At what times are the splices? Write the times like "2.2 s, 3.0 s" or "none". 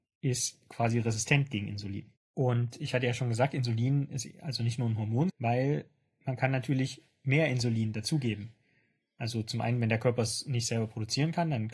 2.2 s, 5.3 s